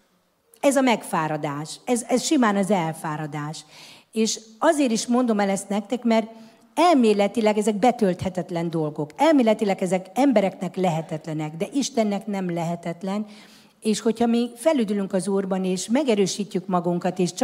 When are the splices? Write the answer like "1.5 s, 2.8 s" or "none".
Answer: none